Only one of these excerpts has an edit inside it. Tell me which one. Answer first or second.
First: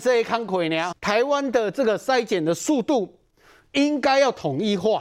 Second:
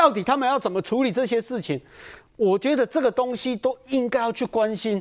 first